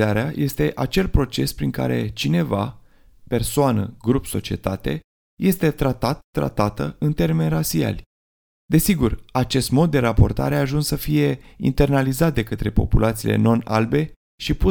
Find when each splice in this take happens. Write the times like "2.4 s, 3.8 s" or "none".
8.5 s